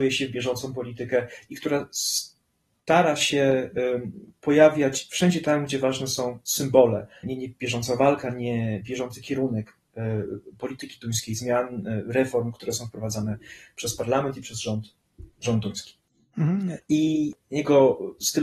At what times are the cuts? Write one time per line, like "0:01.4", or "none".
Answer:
0:07.2
0:16.8

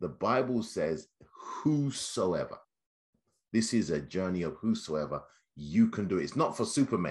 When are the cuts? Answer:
none

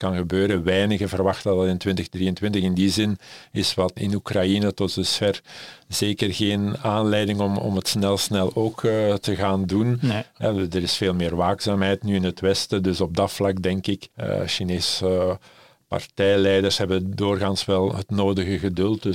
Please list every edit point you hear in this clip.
0:04.0
0:14.1

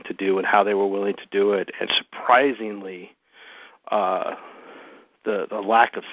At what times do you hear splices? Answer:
0:01.9

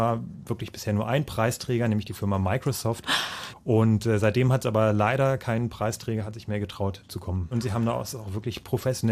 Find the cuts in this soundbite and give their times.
0:03.5
0:07.5

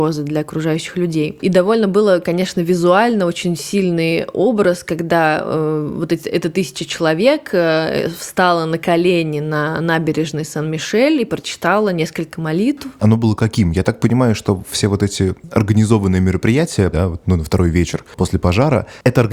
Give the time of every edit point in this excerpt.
0:13.0
0:16.9

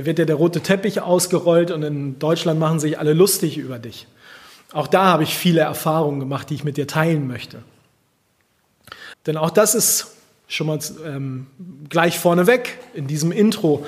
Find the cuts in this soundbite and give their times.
0:09.1

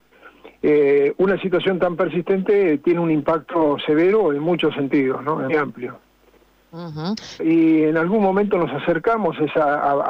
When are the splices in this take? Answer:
0:05.5
0:07.4

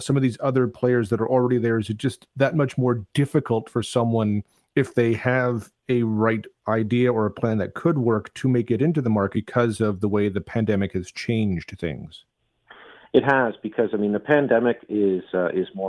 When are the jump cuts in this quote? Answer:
0:09.3

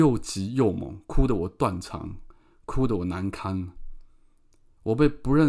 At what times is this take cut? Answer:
none

